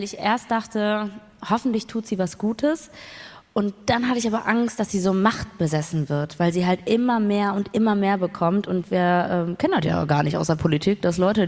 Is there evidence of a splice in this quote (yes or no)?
no